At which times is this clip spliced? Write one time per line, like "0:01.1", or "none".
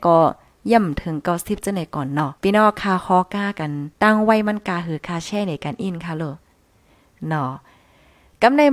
0:02.4
0:03.9